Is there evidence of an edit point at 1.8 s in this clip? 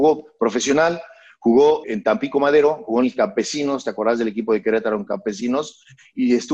yes; 1 cut; at 1.8 s

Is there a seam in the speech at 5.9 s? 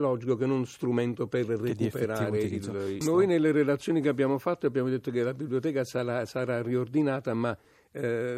no; 1 cut; at 3.0 s

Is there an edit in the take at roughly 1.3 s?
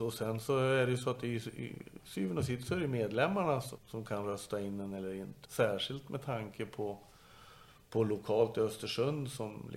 no; 2 cuts; at 3.8 s, 5.4 s

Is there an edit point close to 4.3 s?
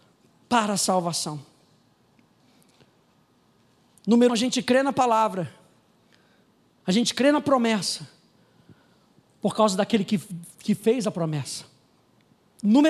yes; 1 cut; at 4.3 s

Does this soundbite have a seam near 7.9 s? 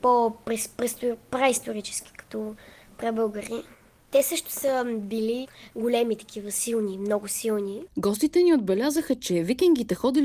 yes; 1 cut; at 7.9 s

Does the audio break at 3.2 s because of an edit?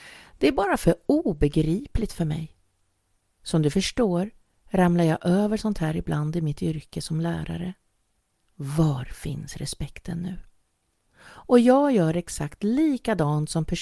no; 2 cuts; at 8.4 s, 11.1 s

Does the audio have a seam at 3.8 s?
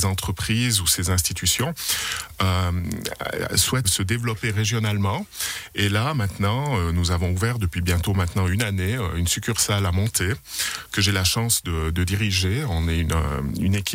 yes; 1 cut; at 3.8 s

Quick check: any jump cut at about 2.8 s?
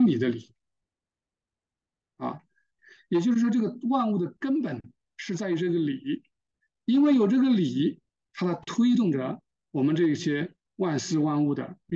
yes; 1 cut; at 2.8 s

